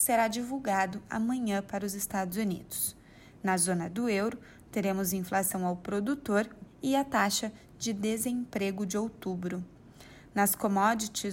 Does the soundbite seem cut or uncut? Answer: cut